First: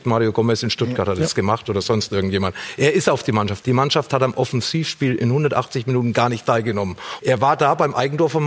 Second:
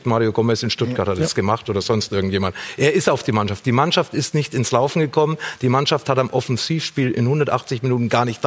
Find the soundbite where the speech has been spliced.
first; 2 cuts; at 3.6 s, 7.2 s

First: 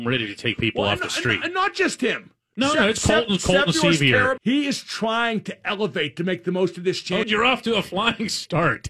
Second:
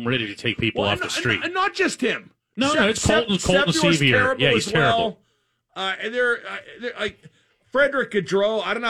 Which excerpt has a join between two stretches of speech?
first; 2 cuts; at 4.4 s, 7.2 s

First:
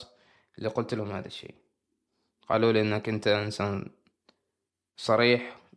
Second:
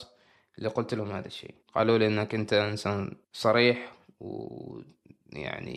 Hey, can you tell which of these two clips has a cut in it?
second; 2 cuts; at 1.6 s, 3.2 s

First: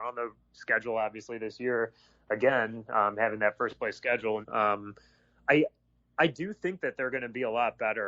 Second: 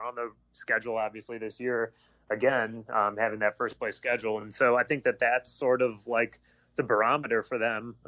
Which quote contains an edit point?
first; 1 cut; at 4.4 s

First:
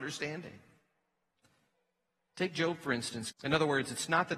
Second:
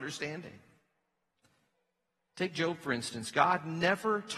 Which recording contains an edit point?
first; 1 cut; at 3.3 s

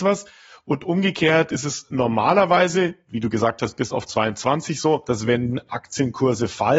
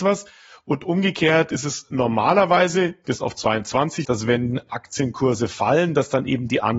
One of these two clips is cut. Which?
second; 2 cuts; at 3.0 s, 4.0 s

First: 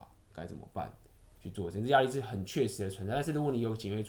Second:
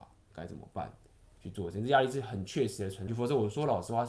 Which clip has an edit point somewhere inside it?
second; 1 cut; at 3.1 s

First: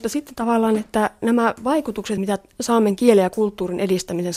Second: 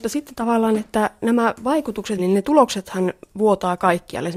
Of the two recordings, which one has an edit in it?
second; 1 cut; at 2.2 s

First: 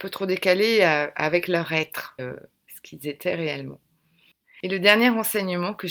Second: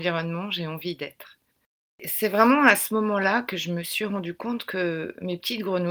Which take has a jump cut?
first; 1 cut; at 2.2 s

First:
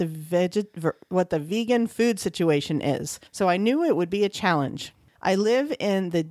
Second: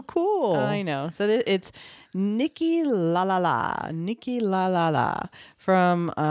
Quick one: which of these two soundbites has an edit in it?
first; 2 cuts; at 3.3 s, 5.2 s

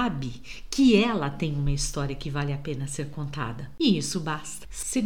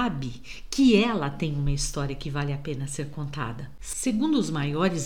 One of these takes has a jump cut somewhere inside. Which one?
second; 1 cut; at 3.8 s

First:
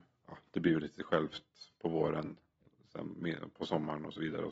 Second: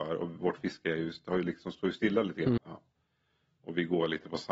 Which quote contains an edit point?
second; 1 cut; at 2.6 s

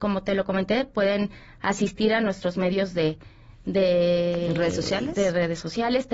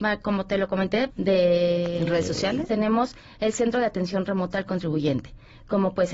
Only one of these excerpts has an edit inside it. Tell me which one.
second; 2 cuts; at 1.1 s, 2.7 s

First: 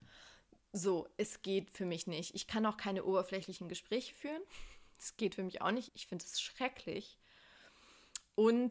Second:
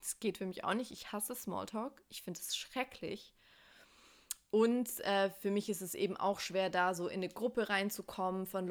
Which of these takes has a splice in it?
first; 1 cut; at 5.9 s

